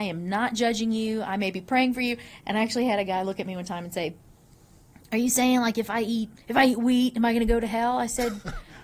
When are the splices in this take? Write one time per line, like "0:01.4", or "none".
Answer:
0:06.4